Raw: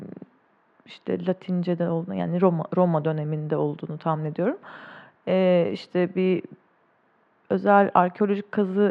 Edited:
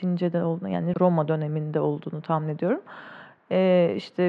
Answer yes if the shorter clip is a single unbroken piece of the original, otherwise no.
no